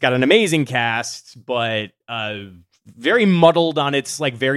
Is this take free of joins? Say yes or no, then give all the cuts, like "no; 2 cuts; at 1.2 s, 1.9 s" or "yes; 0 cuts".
yes; 0 cuts